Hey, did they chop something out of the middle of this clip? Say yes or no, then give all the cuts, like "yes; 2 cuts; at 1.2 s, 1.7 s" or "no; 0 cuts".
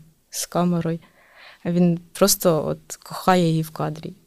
no; 0 cuts